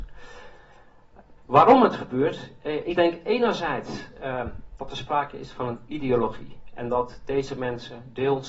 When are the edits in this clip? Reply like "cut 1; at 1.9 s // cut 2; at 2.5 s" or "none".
cut 1; at 1.4 s